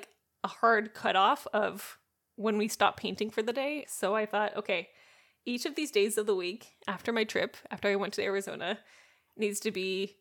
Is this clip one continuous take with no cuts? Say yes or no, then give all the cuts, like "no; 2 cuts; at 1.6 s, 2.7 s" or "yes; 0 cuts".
no; 1 cut; at 3.8 s